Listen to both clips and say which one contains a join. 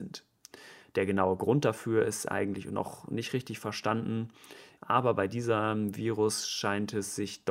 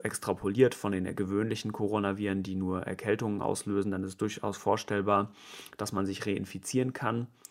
first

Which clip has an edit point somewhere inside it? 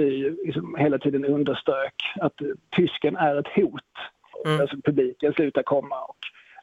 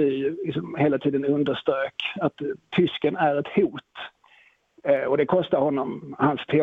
first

